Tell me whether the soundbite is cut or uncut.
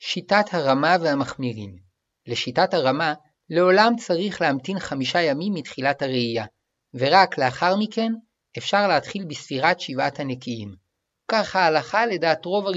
cut